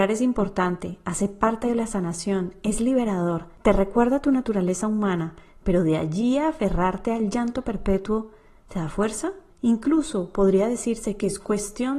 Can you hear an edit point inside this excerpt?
yes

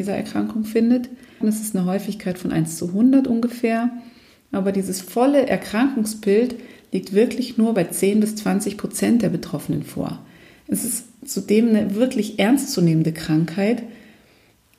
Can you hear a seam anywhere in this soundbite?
yes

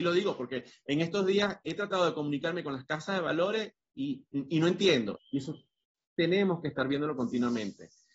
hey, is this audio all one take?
no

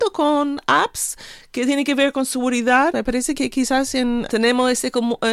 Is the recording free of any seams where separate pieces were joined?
no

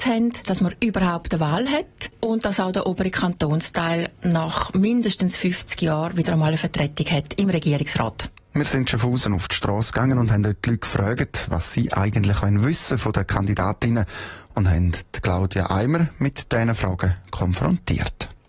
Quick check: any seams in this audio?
no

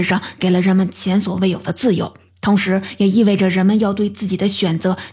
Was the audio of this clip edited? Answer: no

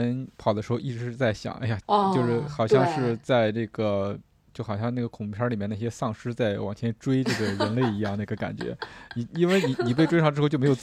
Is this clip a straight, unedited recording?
no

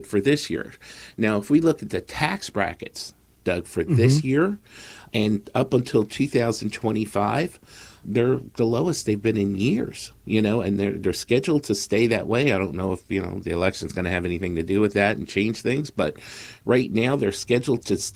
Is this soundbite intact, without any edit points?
yes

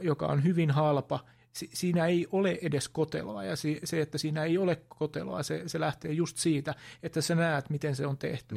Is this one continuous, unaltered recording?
yes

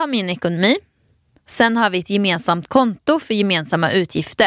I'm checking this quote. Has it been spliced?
yes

